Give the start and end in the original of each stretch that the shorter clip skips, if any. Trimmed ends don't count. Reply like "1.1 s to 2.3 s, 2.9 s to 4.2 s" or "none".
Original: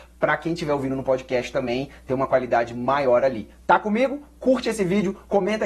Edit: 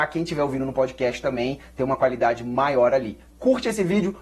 3.6 s to 4.3 s